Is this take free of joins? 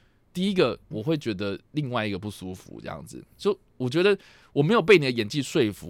no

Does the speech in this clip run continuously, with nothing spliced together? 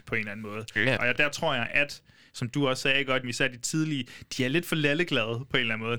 no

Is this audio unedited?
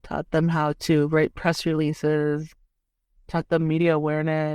yes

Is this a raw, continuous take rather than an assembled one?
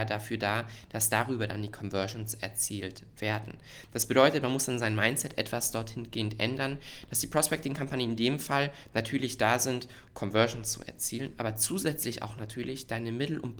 no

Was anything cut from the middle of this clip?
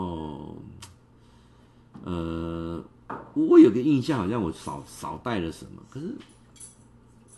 no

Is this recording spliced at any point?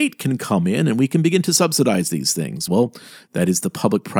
no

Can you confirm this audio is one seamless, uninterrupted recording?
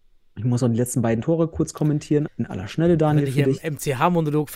no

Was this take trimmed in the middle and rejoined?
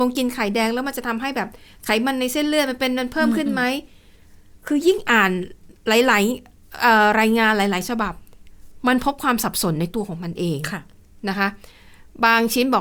yes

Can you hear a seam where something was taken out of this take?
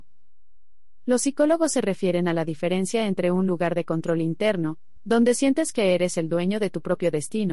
no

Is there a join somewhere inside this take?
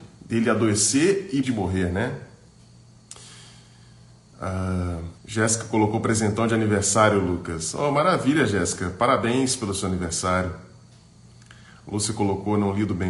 yes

